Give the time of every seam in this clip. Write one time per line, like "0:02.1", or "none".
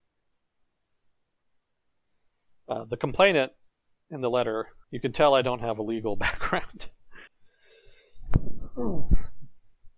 0:04.8
0:07.3

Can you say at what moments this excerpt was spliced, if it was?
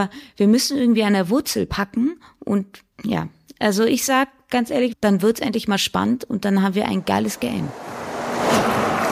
0:02.9
0:04.9

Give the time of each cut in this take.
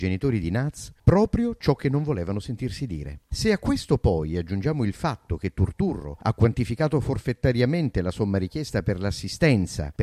none

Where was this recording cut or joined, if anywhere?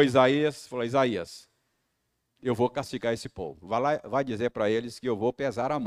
none

